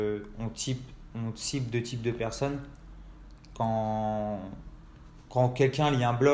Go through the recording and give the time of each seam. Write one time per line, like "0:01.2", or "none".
none